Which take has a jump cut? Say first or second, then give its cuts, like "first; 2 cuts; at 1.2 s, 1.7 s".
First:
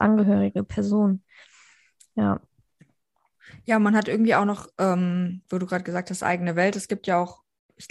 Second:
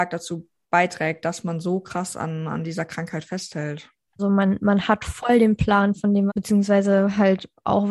second; 2 cuts; at 4.2 s, 6.3 s